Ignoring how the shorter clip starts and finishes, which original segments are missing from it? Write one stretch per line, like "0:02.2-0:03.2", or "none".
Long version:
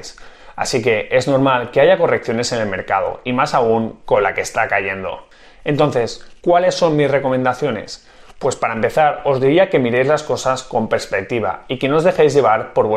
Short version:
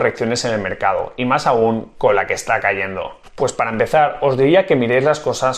0:05.3-0:08.3